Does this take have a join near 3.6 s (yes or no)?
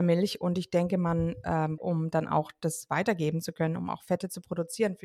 no